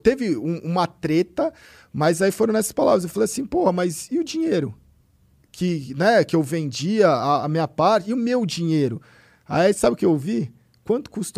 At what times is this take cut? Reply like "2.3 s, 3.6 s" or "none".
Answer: none